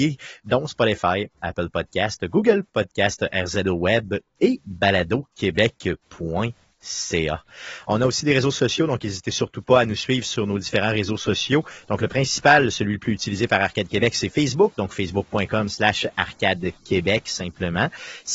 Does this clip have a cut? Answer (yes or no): no